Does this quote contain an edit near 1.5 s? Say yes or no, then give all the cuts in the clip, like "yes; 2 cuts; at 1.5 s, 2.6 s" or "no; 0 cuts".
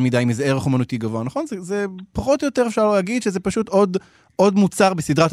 no; 0 cuts